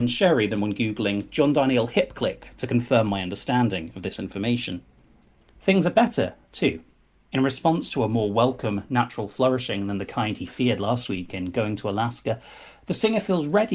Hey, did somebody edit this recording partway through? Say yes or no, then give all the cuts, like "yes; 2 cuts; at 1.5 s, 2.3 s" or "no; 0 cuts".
no; 0 cuts